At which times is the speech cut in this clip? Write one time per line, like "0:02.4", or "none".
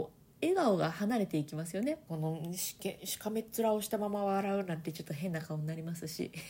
0:02.1